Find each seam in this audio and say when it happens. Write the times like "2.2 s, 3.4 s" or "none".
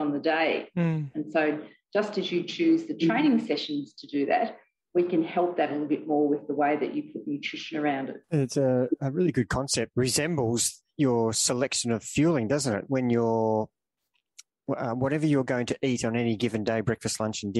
8.2 s, 9.9 s